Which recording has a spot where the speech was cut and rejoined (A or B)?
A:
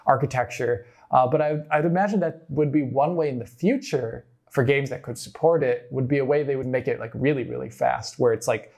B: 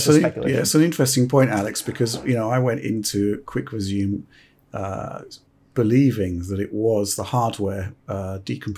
A